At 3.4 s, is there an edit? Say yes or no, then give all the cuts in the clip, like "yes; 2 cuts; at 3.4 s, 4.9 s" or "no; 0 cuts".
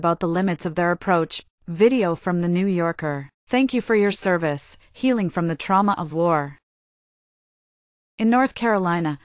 yes; 2 cuts; at 1.5 s, 3.4 s